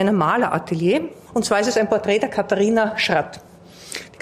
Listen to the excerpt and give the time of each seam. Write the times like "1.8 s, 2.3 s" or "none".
1.3 s

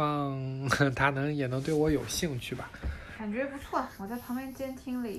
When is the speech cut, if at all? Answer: none

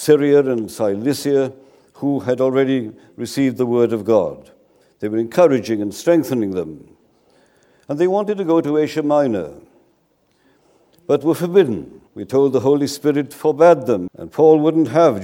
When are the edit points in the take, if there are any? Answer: 12.1 s, 14.1 s

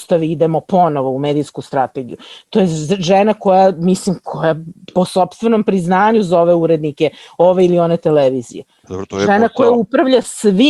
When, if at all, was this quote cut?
none

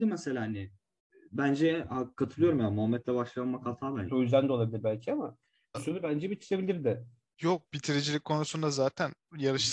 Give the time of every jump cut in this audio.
4.1 s, 5.7 s

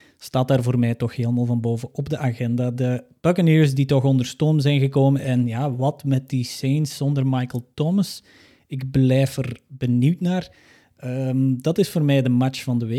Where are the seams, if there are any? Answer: none

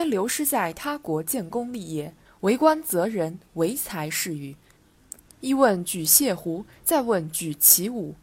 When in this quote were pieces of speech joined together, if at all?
2.2 s, 5.2 s

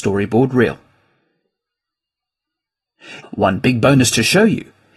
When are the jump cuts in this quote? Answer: 3.2 s

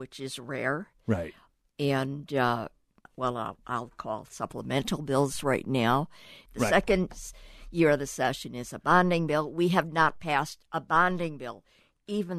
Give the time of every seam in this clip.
3.0 s, 6.5 s

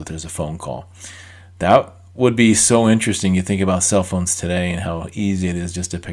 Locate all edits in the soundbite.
none

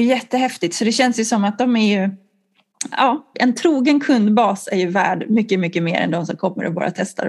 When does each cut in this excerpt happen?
3.3 s

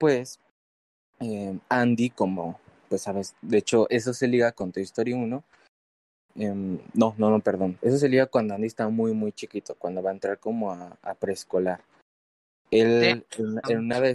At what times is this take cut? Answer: none

